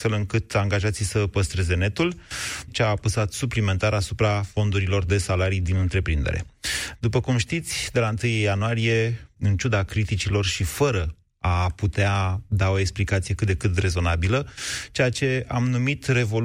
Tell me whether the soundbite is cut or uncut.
cut